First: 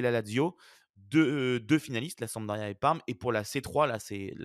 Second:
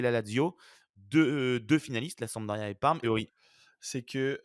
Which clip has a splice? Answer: second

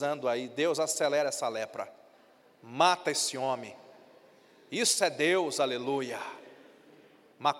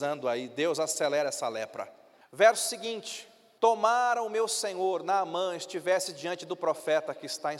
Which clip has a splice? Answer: second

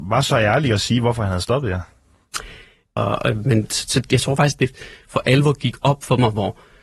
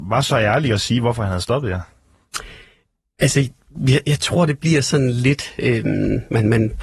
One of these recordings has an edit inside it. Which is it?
first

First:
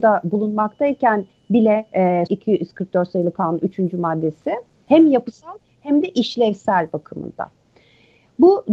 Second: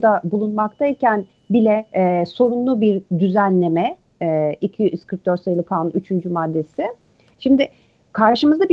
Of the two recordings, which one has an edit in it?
first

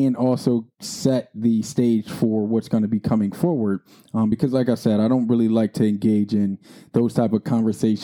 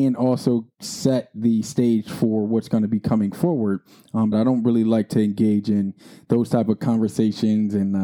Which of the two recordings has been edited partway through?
second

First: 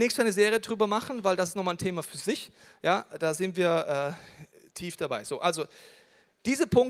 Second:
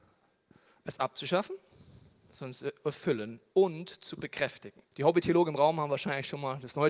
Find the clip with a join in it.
second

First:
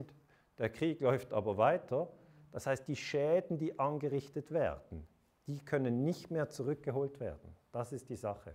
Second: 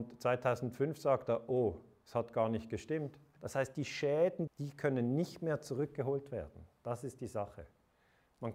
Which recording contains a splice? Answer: second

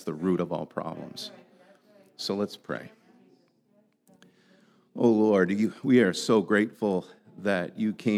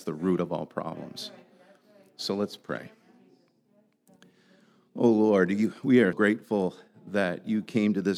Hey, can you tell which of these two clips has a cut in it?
second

